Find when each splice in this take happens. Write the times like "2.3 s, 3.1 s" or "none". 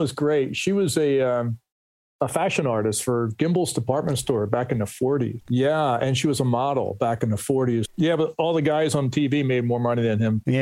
5.4 s, 7.8 s